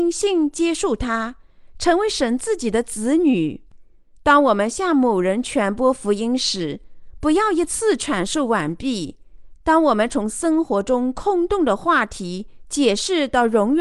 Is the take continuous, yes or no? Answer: no